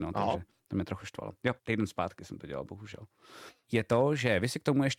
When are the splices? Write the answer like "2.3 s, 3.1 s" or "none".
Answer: 1.6 s, 3.6 s